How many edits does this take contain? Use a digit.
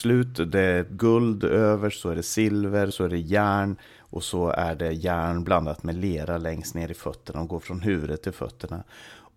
1